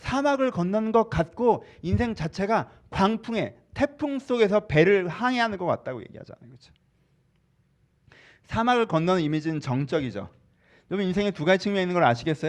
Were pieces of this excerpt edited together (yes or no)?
no